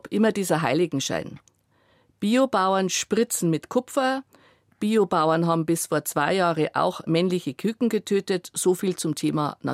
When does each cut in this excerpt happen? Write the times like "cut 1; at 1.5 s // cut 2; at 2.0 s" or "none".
none